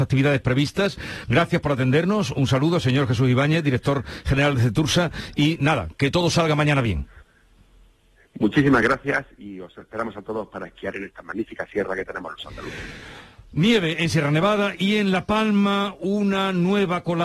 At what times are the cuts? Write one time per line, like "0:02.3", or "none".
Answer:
none